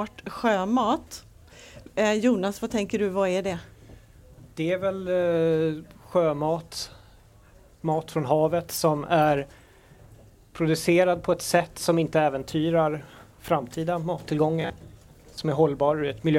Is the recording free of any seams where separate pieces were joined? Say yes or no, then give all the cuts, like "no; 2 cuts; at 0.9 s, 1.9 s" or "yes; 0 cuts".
yes; 0 cuts